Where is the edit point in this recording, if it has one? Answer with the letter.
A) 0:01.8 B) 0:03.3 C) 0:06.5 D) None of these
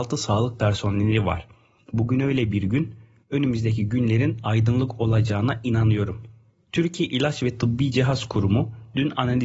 A